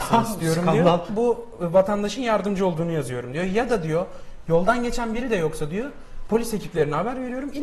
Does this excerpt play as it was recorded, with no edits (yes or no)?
no